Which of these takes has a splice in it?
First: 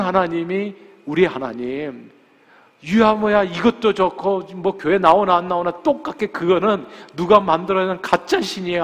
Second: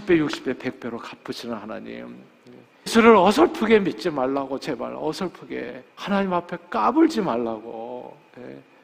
second; 2 cuts; at 2.9 s, 5.9 s

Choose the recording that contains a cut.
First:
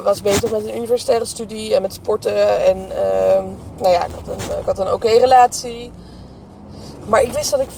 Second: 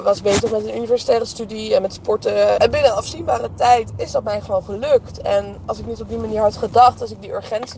second; 1 cut; at 2.6 s

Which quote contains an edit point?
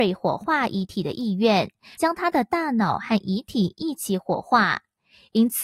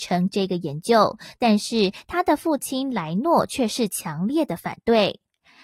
first; 1 cut; at 1.9 s

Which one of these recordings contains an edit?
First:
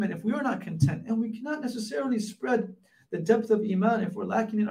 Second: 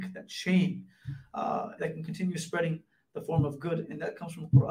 second; 1 cut; at 1.8 s

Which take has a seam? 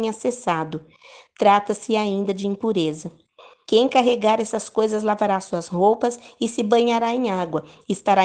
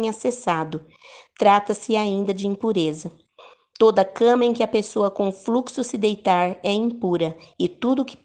first; 1 cut; at 3.6 s

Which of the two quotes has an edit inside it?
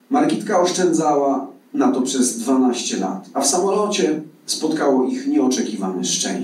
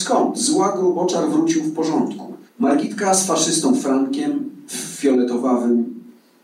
second; 1 cut; at 2.5 s

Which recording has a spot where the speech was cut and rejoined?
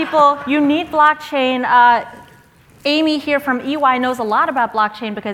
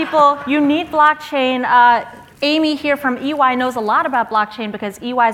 second; 1 cut; at 2.3 s

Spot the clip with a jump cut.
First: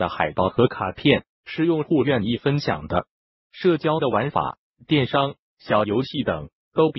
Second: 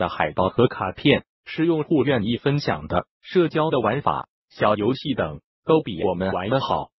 second; 2 cuts; at 3.1 s, 4.4 s

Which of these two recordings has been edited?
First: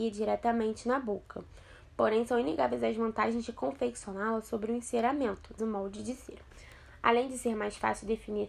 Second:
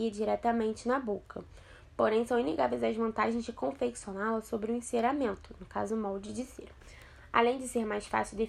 first; 1 cut; at 5.6 s

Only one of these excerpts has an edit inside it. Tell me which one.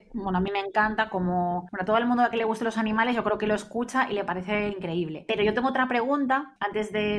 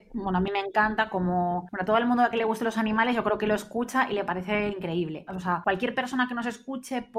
second; 1 cut; at 5.3 s

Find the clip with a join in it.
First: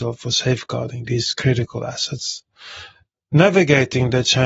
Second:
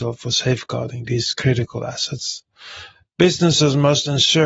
first; 1 cut; at 3.1 s

